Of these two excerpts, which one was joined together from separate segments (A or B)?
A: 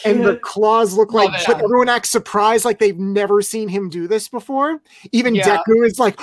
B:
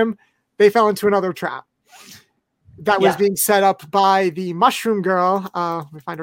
A